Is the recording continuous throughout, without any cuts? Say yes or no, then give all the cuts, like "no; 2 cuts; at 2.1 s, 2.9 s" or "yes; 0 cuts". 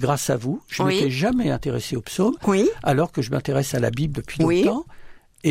yes; 0 cuts